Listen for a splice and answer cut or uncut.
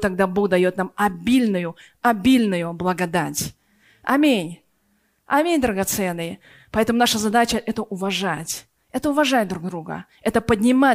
uncut